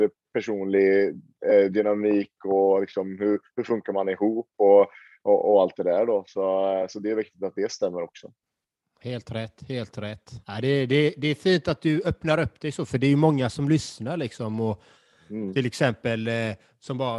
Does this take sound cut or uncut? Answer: cut